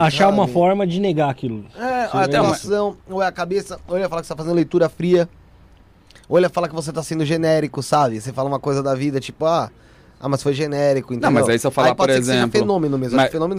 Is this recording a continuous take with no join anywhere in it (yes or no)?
yes